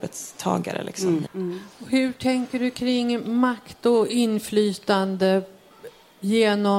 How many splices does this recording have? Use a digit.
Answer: 1